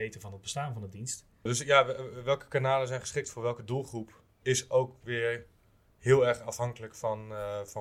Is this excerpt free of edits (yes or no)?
no